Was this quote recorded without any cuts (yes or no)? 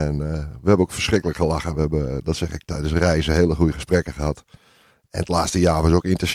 yes